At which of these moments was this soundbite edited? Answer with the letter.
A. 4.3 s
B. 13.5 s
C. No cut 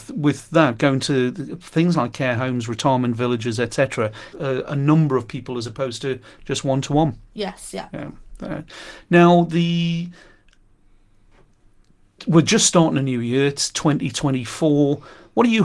A